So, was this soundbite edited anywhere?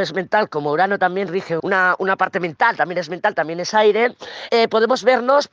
yes; 2 cuts; at 1.6 s, 4.5 s

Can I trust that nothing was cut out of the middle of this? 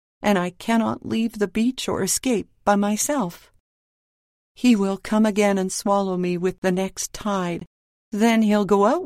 yes; 0 cuts

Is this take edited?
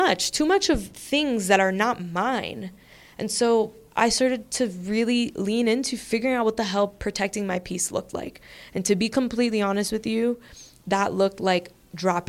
no; 0 cuts

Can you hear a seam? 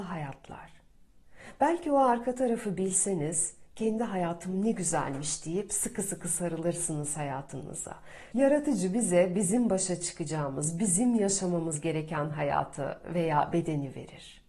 yes; 1 cut; at 8.3 s

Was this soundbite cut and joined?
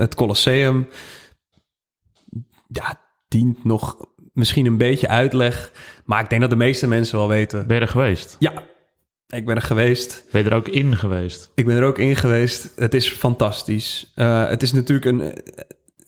no; 0 cuts

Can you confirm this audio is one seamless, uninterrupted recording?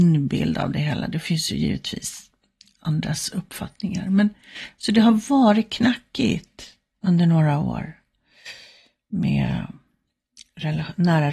yes; 0 cuts

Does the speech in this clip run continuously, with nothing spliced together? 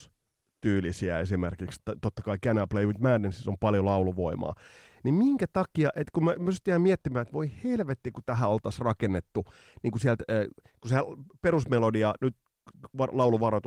no; 1 cut; at 1.8 s

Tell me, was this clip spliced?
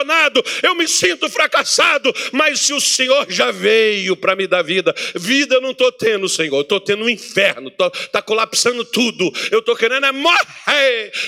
no; 0 cuts

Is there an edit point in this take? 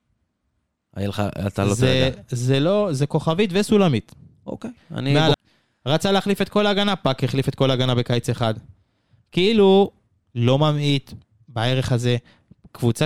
yes; 2 cuts; at 5.3 s, 10.2 s

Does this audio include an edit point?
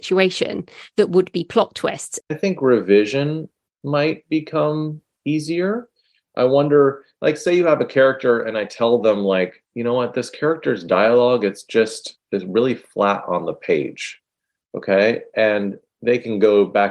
yes; 1 cut; at 2.2 s

